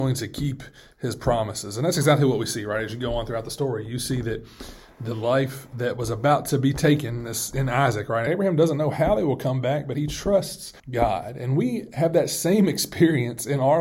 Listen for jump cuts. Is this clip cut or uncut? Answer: cut